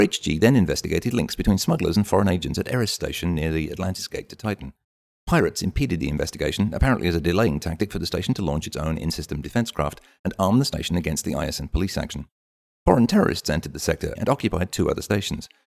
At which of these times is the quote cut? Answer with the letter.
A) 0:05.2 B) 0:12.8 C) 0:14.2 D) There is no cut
C